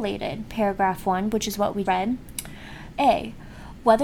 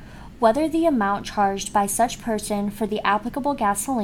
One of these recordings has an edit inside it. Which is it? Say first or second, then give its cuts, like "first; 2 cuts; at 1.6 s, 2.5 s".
first; 2 cuts; at 1.8 s, 2.9 s